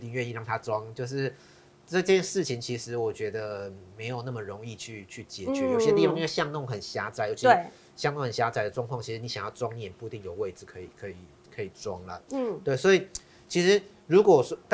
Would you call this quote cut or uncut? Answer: uncut